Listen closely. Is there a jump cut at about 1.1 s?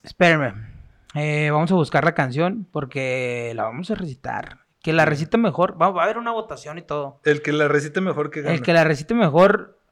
no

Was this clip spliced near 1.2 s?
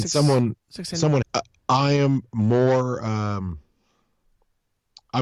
yes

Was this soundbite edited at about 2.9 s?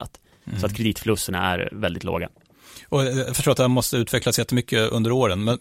no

